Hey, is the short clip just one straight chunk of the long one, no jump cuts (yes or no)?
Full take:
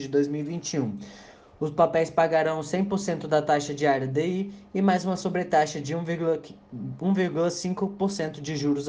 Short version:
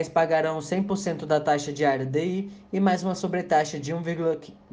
yes